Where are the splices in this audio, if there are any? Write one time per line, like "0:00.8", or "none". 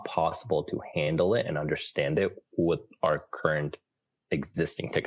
none